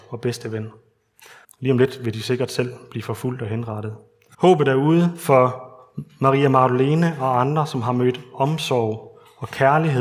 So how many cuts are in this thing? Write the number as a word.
two